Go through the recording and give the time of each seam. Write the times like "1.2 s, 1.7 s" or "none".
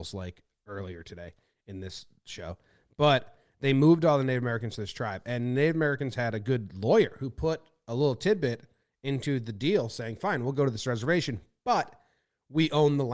none